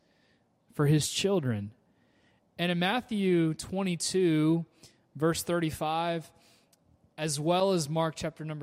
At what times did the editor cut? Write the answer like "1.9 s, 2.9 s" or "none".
none